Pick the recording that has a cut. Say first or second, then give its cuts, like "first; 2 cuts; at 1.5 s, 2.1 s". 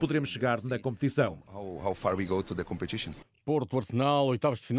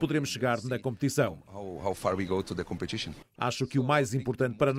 second; 1 cut; at 3.4 s